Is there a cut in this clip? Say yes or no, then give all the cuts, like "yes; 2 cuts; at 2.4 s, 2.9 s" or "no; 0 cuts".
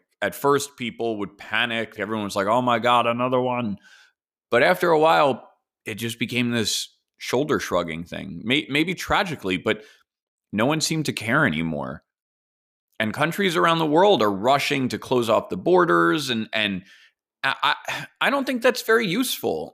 yes; 1 cut; at 2.0 s